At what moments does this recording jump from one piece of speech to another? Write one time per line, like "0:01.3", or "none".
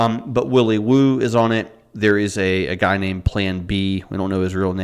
none